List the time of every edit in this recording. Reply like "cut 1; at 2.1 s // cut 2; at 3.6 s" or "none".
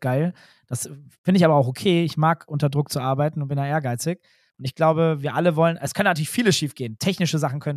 none

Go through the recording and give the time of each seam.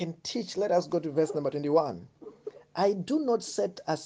none

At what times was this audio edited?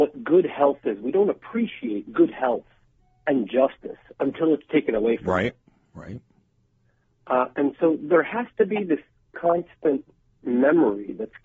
none

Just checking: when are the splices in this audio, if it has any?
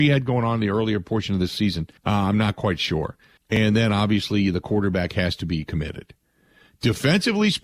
cut 1; at 2.0 s // cut 2; at 3.4 s

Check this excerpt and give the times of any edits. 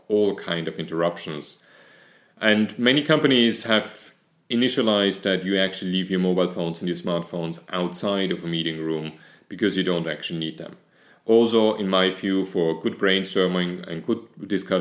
none

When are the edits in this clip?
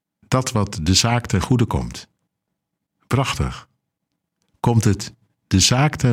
none

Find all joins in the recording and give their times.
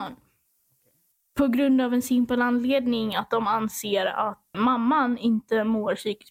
cut 1; at 4.5 s

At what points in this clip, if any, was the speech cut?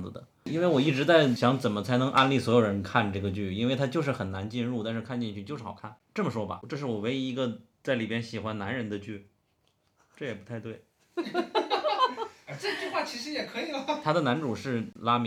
none

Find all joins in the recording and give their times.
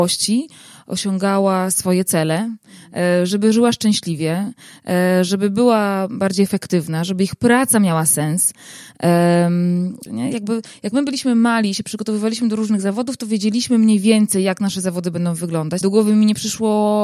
cut 1; at 10.1 s // cut 2; at 15.8 s

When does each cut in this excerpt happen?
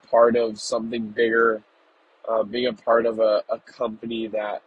none

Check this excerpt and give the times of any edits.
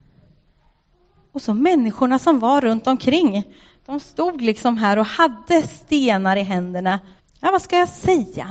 cut 1; at 7.2 s

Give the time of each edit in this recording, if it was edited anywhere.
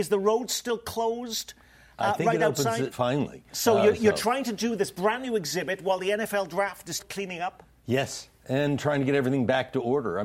cut 1; at 2.9 s // cut 2; at 7.0 s

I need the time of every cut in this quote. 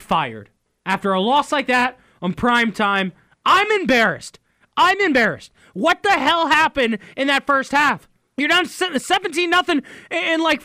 cut 1; at 8.3 s

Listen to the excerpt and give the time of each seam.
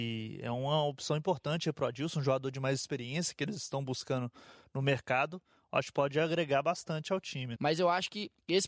cut 1; at 7.6 s

